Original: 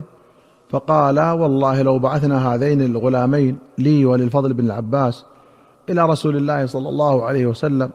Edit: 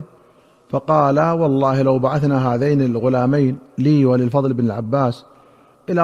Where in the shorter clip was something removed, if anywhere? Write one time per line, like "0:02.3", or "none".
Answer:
none